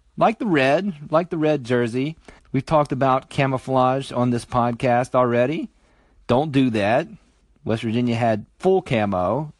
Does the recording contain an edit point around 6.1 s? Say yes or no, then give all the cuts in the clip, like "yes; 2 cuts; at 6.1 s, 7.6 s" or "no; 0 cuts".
no; 1 cut; at 2.4 s